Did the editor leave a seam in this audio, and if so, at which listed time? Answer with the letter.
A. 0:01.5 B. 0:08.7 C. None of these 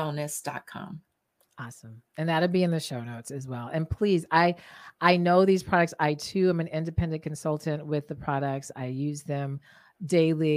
C